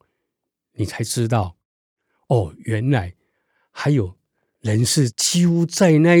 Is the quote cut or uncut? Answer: uncut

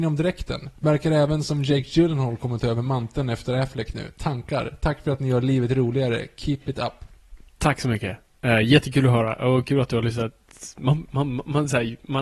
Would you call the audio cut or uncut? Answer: uncut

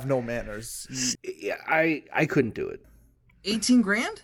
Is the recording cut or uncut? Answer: cut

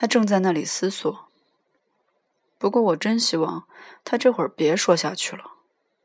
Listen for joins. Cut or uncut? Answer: uncut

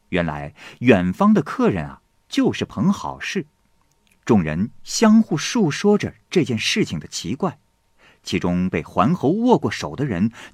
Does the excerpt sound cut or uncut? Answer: uncut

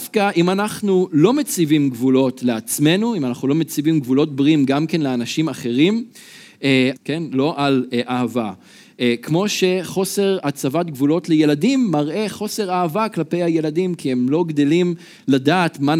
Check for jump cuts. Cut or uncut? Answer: cut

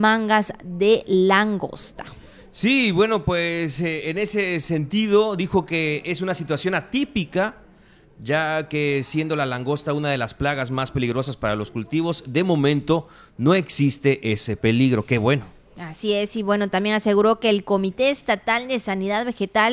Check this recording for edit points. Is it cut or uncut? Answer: uncut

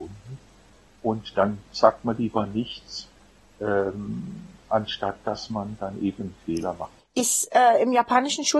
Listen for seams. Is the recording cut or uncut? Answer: cut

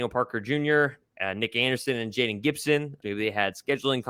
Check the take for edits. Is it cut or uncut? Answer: cut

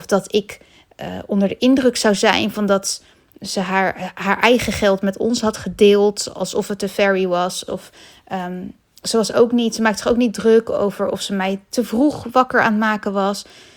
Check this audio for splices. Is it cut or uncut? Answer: cut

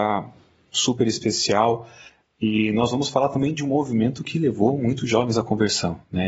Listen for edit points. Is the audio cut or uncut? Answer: uncut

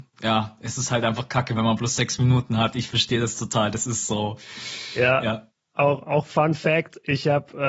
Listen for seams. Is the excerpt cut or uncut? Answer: uncut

